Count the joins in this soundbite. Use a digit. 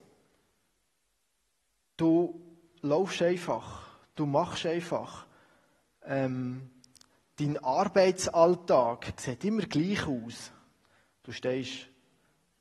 0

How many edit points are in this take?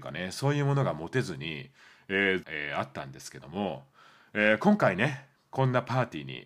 1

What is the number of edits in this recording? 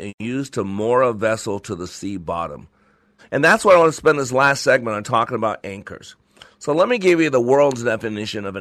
1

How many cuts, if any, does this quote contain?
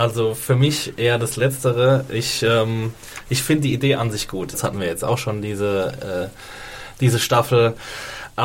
1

